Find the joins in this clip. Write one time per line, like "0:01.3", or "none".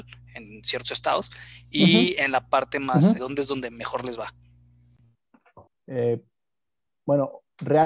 0:03.2
0:05.7